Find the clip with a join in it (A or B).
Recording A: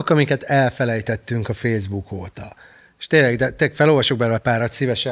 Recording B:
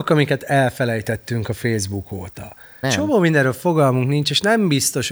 B